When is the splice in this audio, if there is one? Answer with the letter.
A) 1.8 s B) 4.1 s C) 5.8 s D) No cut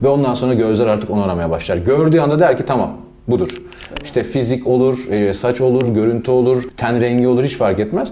D